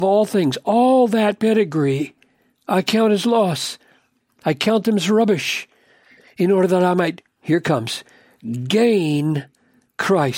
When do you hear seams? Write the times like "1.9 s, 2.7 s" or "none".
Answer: none